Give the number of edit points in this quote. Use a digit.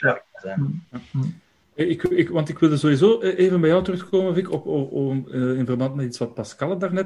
0